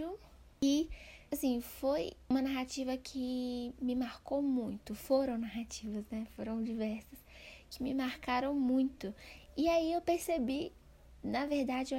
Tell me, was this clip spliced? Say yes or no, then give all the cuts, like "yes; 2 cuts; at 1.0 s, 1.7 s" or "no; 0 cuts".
no; 0 cuts